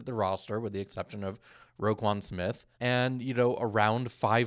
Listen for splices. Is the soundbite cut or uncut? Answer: cut